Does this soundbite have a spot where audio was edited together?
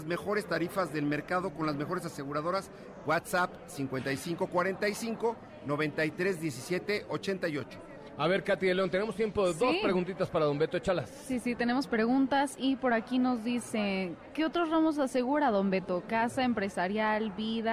no; 0 cuts

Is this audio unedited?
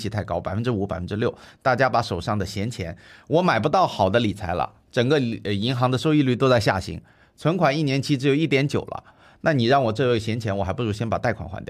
yes; 0 cuts

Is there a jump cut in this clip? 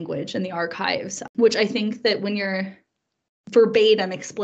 no; 0 cuts

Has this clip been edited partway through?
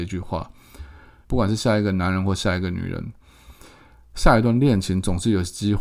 yes; 1 cut; at 1.2 s

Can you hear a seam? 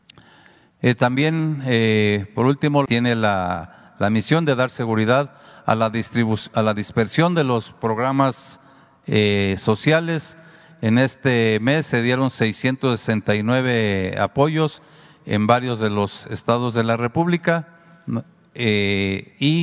yes; 1 cut; at 2.9 s

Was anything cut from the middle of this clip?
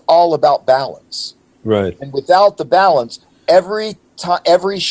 no; 0 cuts

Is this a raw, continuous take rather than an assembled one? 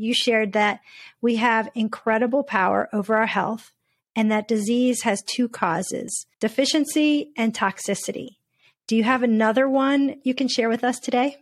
no; 1 cut; at 6.3 s

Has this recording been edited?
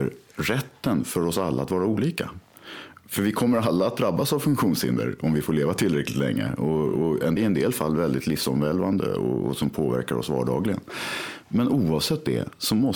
yes; 1 cut; at 7.4 s

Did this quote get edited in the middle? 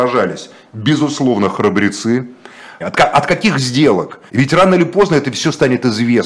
yes; 2 cuts; at 2.8 s, 4.3 s

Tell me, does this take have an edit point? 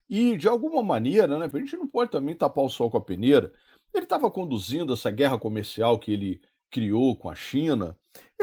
yes; 1 cut; at 1.5 s

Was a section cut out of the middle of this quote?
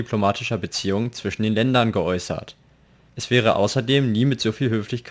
yes; 1 cut; at 3.1 s

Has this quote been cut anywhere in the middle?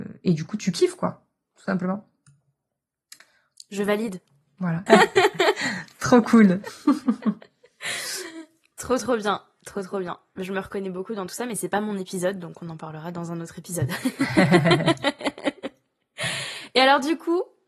yes; 1 cut; at 4.9 s

